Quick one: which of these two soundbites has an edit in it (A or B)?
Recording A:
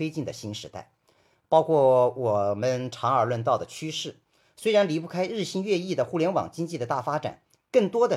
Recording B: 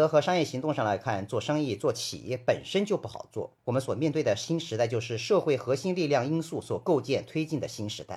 B